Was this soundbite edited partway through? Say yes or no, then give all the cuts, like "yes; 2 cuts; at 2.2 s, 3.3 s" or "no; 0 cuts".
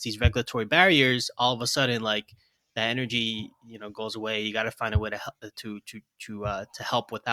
no; 0 cuts